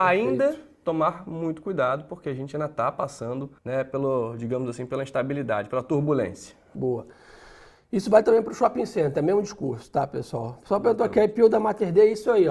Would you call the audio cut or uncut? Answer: cut